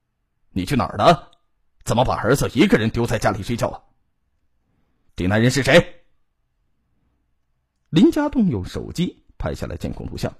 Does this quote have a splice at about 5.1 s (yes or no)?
yes